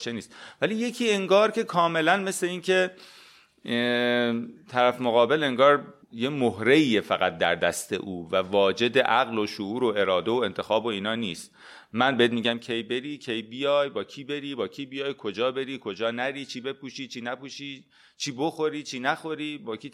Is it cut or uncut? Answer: cut